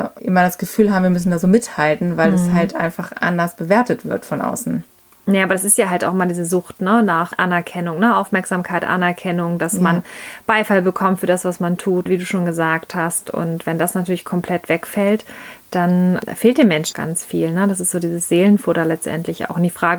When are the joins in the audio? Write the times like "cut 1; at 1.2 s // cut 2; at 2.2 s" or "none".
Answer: cut 1; at 12.1 s // cut 2; at 16.9 s